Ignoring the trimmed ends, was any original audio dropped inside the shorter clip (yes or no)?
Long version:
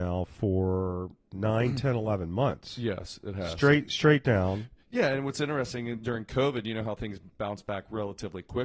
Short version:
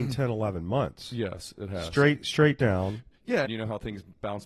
yes